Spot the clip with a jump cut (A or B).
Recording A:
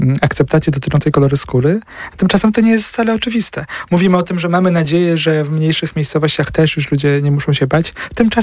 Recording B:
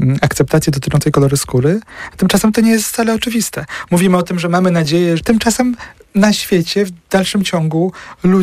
B